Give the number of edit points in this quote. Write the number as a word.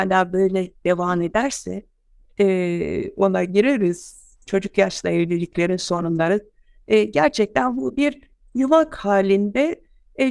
zero